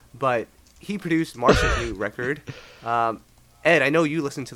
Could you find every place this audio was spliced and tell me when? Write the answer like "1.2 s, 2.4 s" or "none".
none